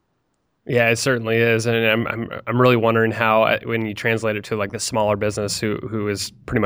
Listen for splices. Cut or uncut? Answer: uncut